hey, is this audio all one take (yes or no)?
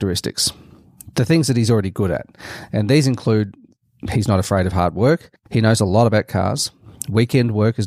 no